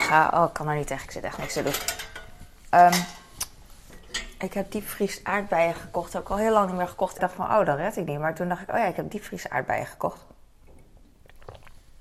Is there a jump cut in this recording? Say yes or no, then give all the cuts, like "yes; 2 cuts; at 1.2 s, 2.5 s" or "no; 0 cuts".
yes; 2 cuts; at 2.7 s, 7.2 s